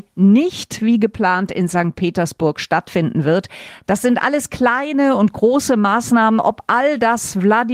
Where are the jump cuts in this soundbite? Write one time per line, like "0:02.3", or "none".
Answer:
none